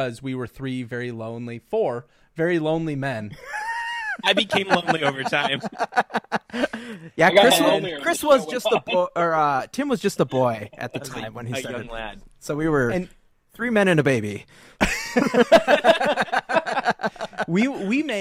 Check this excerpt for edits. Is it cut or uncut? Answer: uncut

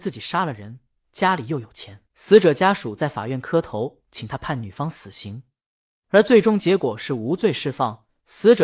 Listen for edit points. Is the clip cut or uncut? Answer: cut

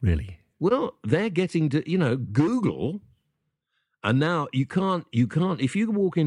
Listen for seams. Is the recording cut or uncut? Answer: uncut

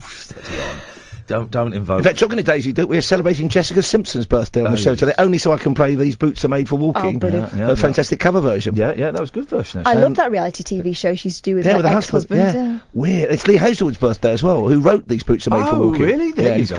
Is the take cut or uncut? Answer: uncut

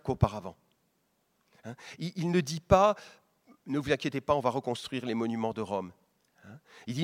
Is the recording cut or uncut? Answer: uncut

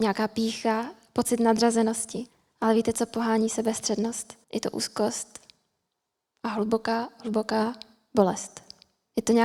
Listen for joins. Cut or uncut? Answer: cut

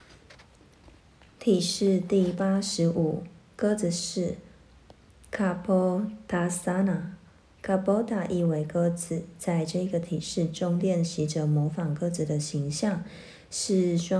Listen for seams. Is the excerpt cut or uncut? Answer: uncut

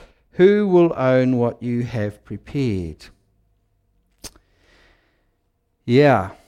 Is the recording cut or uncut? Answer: uncut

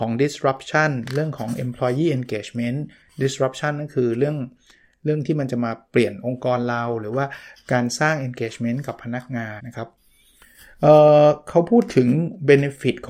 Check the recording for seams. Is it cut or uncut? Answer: cut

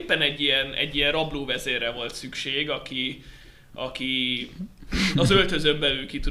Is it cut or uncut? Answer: uncut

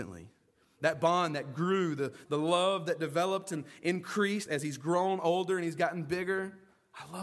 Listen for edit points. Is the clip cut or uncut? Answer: cut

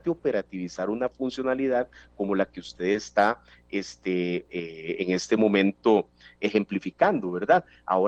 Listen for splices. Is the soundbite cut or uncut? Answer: uncut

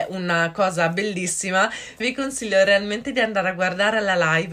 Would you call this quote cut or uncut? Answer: cut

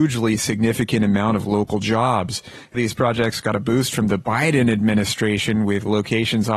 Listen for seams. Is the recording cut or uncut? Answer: cut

